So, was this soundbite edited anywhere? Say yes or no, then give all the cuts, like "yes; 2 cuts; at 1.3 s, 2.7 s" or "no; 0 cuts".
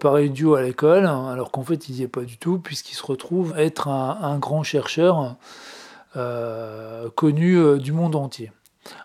yes; 1 cut; at 3.5 s